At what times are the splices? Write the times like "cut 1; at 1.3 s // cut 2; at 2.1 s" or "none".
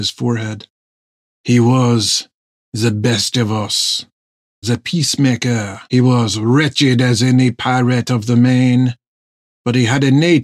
cut 1; at 4.6 s // cut 2; at 5.8 s